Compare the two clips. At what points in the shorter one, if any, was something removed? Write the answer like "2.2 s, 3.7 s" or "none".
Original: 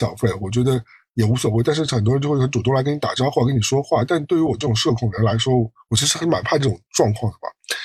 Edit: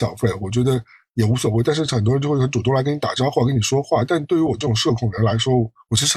none